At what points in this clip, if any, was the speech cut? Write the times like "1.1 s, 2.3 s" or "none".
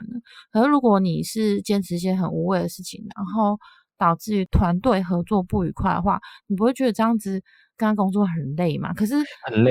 none

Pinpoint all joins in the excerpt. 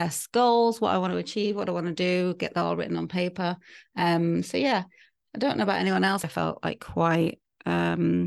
6.2 s

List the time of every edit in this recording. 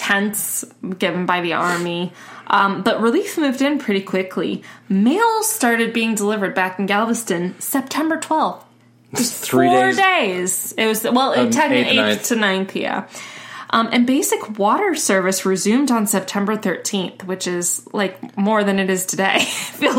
none

